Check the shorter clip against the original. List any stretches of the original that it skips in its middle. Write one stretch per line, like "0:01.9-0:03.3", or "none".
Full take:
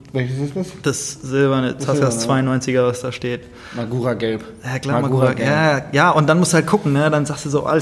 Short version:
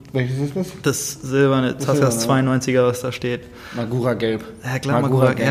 none